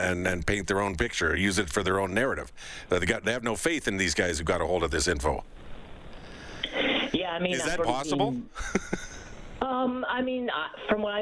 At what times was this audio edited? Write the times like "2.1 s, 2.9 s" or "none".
7.8 s